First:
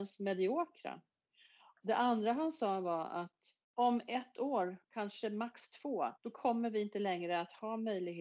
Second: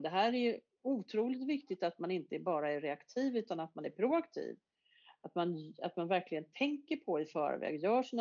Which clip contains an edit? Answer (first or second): first